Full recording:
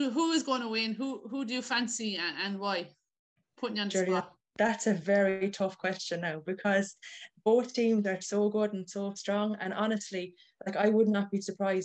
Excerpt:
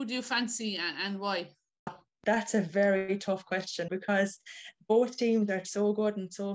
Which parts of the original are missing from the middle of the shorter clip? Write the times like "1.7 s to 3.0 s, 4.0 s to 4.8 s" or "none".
3.3 s to 4.2 s, 6.2 s to 6.4 s